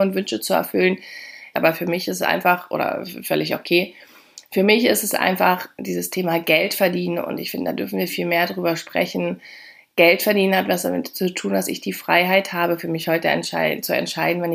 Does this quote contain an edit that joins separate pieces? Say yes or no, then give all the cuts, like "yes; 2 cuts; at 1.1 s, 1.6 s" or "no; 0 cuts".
yes; 2 cuts; at 1.5 s, 8.1 s